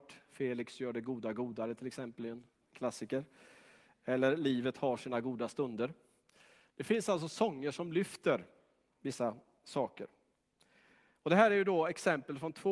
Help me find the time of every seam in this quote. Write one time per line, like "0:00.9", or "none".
none